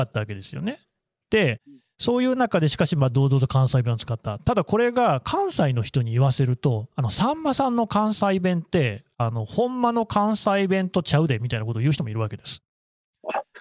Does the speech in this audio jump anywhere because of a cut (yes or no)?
no